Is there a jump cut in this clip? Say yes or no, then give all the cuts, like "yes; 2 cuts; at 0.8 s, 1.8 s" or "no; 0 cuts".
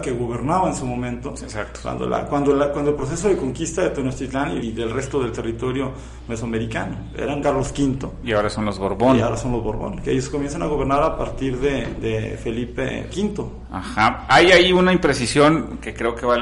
yes; 3 cuts; at 4.6 s, 7.4 s, 13.1 s